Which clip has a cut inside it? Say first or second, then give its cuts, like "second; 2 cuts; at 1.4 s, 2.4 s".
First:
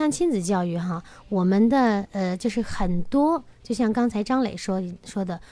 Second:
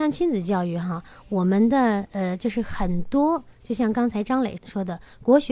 second; 1 cut; at 4.6 s